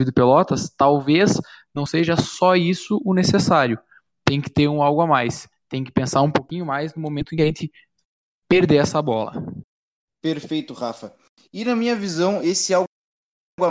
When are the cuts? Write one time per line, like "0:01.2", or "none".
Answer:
none